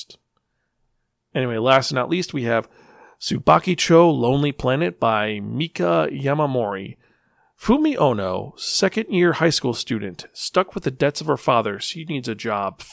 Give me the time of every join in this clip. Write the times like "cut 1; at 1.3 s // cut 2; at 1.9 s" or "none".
none